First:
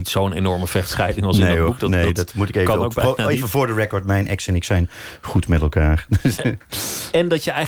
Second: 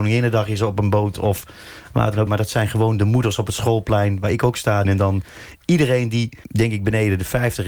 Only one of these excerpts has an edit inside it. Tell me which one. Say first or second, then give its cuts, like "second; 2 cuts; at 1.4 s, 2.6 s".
second; 3 cuts; at 2.3 s, 4.8 s, 6.4 s